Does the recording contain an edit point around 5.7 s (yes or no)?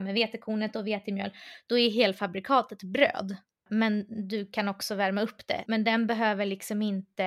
yes